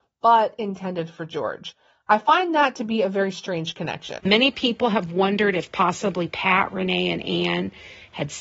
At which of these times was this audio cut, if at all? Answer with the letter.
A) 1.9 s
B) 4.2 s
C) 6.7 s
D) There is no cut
B